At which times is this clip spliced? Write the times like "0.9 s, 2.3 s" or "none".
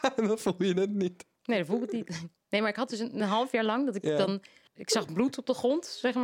none